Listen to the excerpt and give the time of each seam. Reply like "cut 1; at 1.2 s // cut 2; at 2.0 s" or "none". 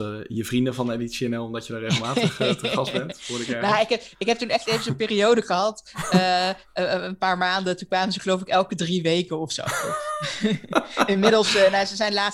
none